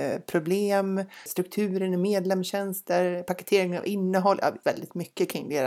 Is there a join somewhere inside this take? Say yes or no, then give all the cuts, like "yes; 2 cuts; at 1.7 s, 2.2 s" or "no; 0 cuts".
yes; 2 cuts; at 1.3 s, 4.6 s